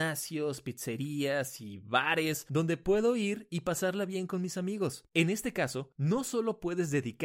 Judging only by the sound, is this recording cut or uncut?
cut